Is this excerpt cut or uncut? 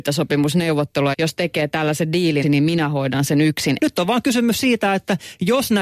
cut